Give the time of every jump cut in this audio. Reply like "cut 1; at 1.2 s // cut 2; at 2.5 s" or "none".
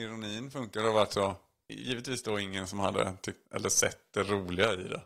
cut 1; at 1.7 s // cut 2; at 3.5 s